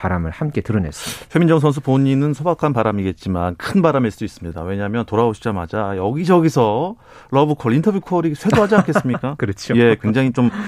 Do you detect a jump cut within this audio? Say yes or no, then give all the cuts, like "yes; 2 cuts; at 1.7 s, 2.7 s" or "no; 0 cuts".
no; 0 cuts